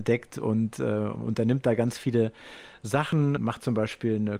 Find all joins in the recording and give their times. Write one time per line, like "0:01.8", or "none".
0:03.4